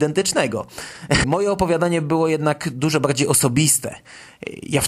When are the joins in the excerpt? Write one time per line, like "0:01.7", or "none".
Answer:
0:01.2